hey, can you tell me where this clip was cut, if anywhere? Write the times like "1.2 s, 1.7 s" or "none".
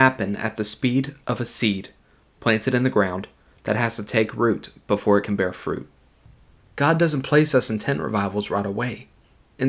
6.6 s